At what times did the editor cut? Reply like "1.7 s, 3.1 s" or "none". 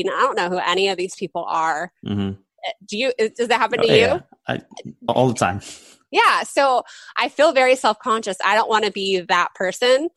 5.1 s